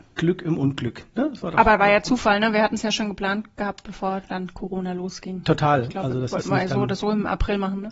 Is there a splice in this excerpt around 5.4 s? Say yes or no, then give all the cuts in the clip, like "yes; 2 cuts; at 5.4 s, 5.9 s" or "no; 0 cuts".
no; 0 cuts